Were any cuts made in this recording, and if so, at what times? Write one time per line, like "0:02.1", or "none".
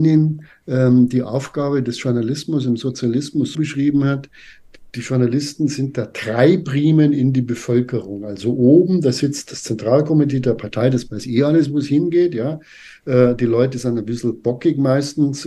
0:03.5